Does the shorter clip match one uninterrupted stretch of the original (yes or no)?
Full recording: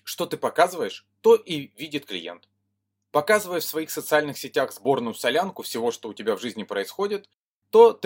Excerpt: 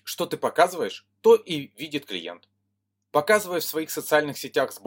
yes